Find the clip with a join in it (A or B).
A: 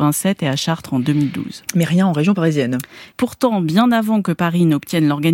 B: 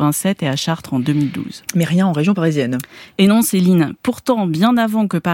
A